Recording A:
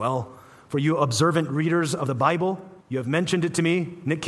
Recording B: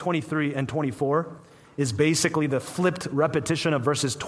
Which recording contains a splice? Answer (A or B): A